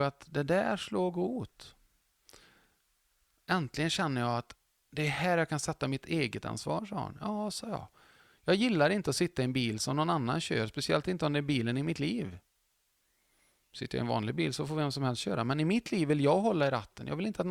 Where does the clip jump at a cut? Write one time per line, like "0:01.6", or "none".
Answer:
none